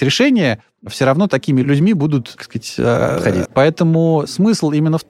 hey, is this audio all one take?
no; 1 cut; at 3.4 s

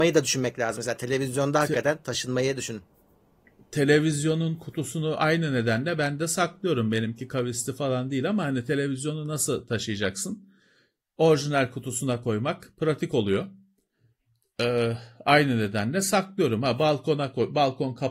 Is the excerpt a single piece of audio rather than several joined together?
yes; 0 cuts

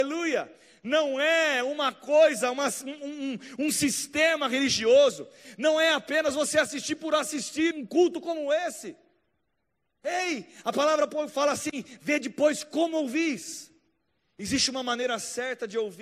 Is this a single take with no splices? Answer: no; 1 cut; at 7.7 s

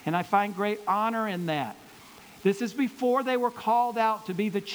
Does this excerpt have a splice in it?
yes; 1 cut; at 2.3 s

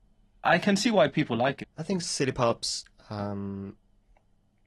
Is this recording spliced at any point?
yes; 1 cut; at 1.6 s

